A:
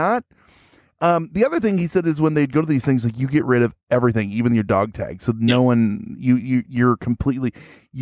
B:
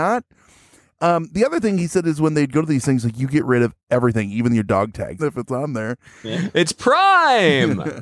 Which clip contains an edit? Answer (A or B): B